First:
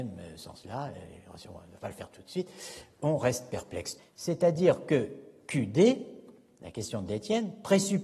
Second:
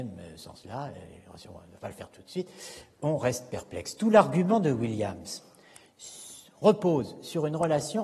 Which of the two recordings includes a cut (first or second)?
first